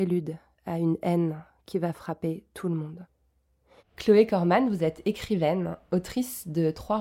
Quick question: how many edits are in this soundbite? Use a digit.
1